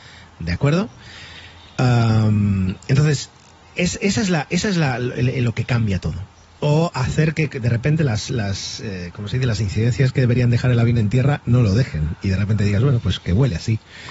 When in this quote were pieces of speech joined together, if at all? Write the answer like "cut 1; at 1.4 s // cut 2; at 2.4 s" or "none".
cut 1; at 6.6 s